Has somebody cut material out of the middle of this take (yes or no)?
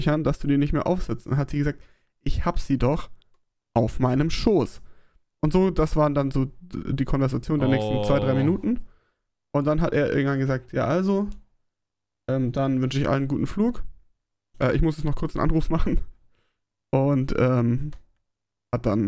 no